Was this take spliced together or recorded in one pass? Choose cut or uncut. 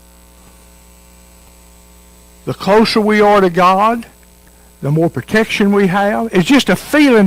uncut